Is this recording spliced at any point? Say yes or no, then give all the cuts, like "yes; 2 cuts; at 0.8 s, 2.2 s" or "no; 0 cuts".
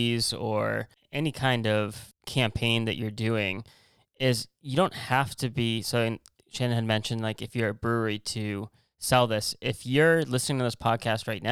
no; 0 cuts